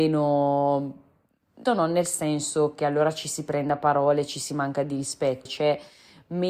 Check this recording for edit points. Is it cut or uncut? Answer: cut